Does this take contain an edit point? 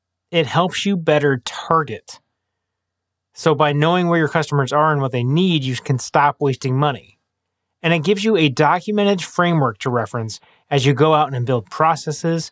no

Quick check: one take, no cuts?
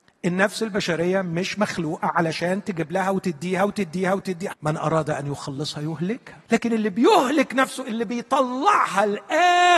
no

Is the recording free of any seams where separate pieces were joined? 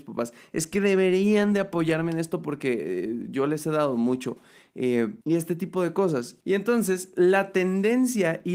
no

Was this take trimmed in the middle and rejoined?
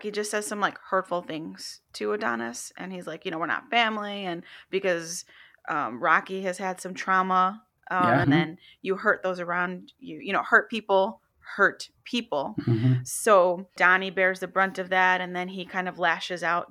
yes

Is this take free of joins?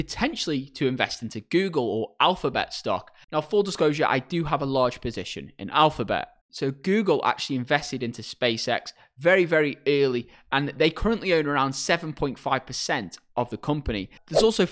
yes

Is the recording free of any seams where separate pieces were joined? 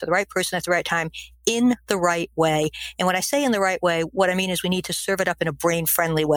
yes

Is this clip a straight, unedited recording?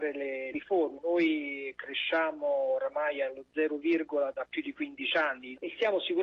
no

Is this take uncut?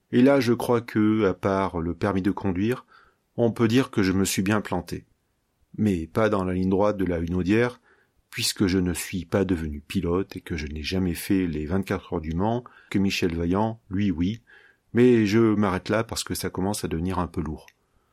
no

